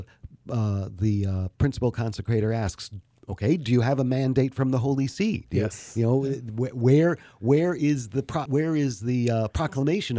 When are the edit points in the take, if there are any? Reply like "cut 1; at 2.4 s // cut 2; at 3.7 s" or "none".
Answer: cut 1; at 8.5 s